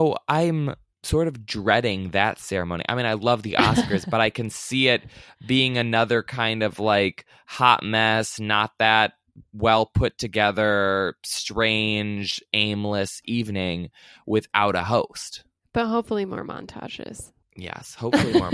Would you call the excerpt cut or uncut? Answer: uncut